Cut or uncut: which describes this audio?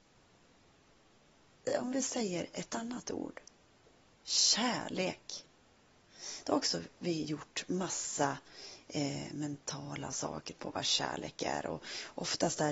uncut